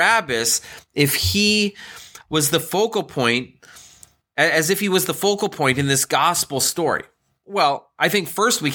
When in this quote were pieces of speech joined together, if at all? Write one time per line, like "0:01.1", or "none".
none